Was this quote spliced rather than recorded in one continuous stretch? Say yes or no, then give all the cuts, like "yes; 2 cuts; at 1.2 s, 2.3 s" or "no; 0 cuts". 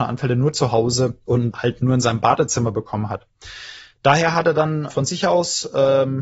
yes; 1 cut; at 4.9 s